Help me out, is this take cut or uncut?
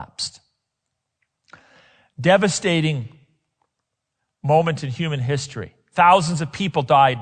uncut